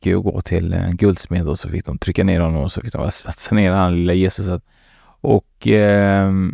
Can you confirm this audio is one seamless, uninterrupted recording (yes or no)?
yes